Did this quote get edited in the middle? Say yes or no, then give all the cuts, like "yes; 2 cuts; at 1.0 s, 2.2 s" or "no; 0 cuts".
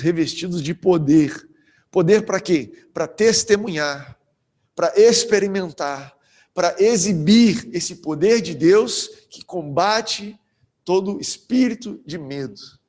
no; 0 cuts